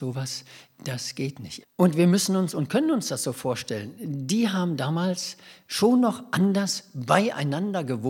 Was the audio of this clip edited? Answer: yes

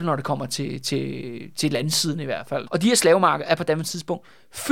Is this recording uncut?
no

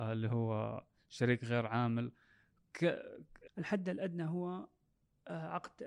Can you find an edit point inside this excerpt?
yes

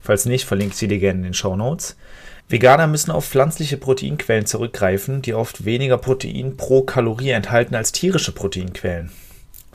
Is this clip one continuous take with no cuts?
no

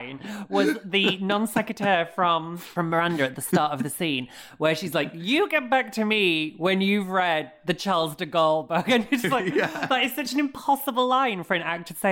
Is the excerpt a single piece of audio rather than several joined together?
yes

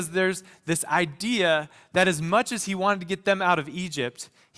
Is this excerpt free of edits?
yes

